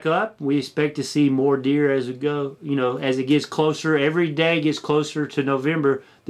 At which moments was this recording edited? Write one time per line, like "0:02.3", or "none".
none